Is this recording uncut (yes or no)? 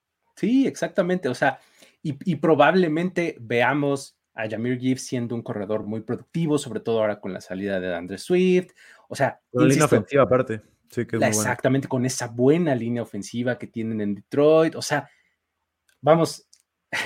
yes